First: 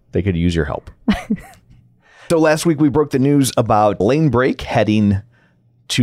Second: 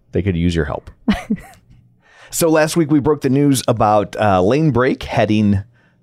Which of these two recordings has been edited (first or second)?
first